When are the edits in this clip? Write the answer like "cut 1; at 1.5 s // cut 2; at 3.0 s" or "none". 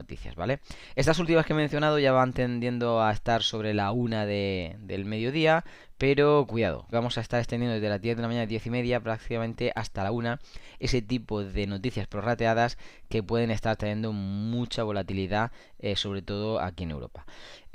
cut 1; at 6.9 s